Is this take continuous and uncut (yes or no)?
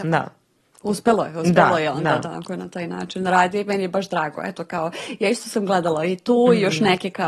yes